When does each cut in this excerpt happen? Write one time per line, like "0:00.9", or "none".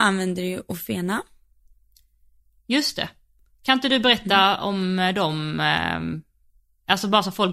none